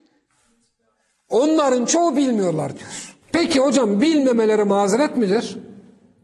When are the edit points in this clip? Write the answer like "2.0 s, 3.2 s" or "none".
3.2 s